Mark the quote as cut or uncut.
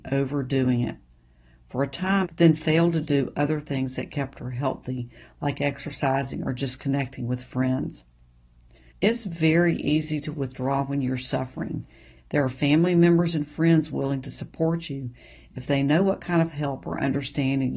cut